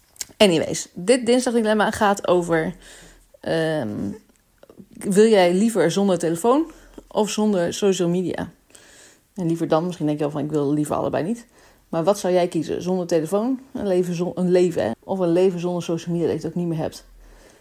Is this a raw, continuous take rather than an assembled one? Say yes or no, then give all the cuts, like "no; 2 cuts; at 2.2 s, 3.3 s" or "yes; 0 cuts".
no; 1 cut; at 14.9 s